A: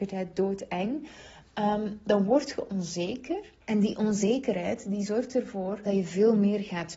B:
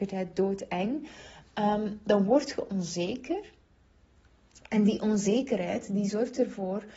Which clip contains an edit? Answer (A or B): A